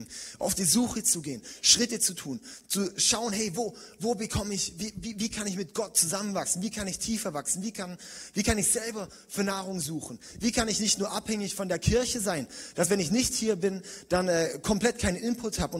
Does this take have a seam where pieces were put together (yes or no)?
no